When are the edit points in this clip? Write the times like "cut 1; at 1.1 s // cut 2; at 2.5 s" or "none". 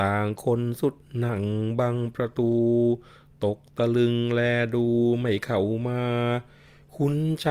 none

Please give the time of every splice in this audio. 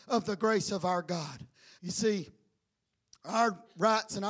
cut 1; at 1.8 s

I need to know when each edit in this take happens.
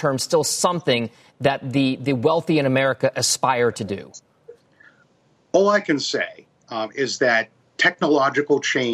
none

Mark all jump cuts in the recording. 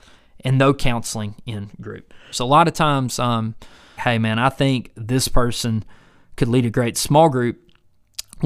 cut 1; at 2.3 s // cut 2; at 4.0 s

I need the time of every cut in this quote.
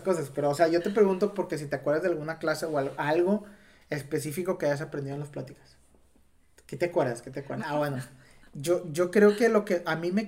cut 1; at 7.6 s

